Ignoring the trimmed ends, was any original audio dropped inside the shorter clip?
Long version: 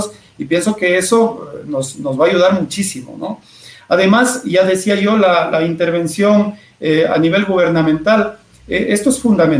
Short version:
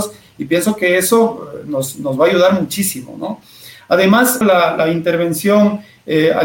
yes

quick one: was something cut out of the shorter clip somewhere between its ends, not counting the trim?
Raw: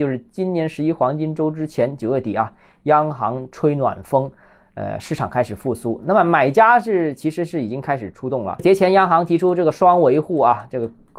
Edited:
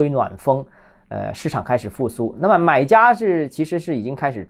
no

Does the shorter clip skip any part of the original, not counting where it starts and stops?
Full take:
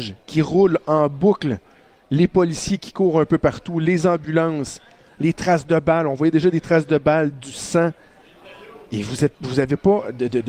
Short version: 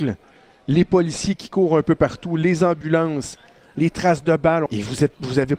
yes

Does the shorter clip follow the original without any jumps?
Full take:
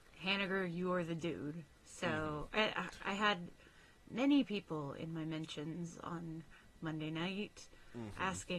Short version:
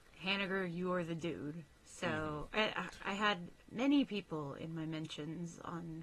no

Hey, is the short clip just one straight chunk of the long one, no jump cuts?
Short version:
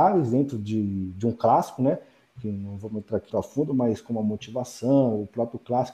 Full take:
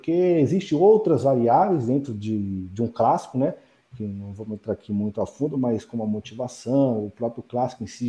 no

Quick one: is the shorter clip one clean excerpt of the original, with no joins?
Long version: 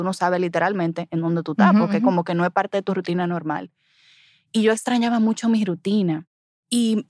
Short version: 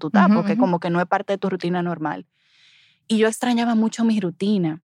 yes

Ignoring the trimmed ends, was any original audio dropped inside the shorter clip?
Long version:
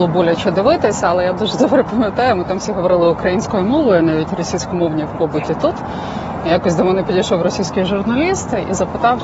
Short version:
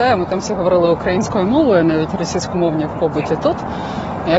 no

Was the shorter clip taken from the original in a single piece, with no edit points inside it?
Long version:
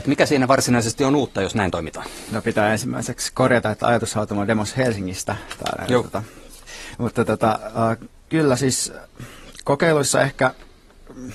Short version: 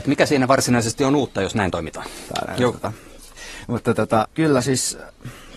no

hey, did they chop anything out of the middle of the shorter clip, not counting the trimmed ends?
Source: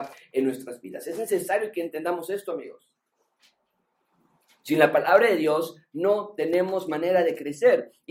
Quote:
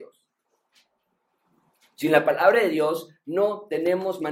no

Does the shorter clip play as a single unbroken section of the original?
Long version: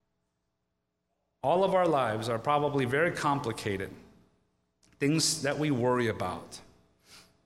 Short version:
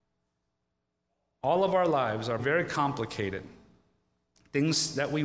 no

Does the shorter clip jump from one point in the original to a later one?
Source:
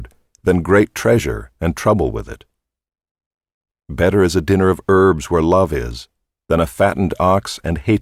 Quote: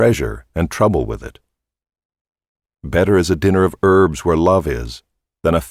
no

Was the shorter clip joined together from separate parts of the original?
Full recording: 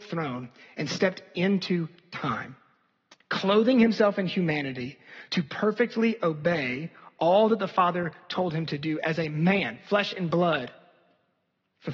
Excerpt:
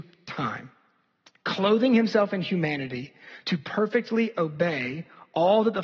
no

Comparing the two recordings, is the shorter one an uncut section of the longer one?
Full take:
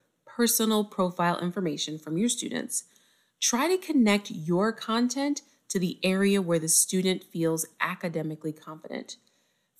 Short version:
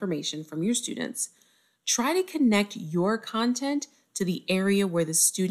yes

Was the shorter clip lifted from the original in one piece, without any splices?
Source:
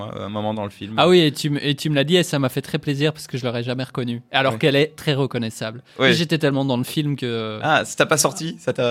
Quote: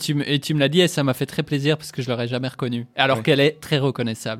yes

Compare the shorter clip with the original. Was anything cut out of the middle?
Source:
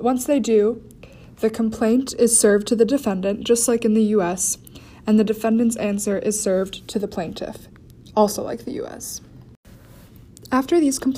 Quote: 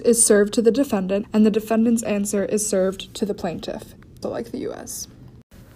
yes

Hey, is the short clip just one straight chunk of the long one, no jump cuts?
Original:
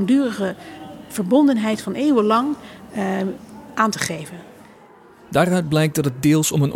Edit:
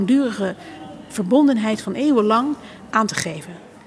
no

